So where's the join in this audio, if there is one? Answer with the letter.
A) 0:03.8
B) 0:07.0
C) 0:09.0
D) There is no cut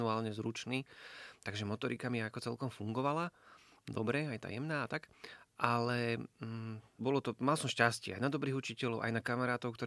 B